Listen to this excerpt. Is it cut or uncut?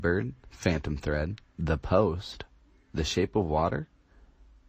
uncut